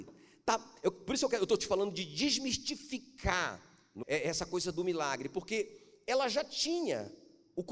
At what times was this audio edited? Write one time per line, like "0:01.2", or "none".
0:04.0